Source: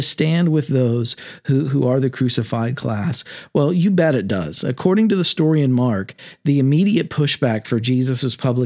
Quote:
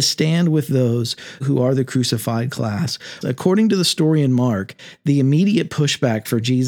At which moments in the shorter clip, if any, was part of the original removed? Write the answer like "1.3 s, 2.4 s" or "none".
1.4 s, 3.2 s